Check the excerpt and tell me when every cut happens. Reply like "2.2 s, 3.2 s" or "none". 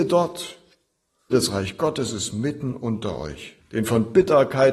1.3 s, 3.6 s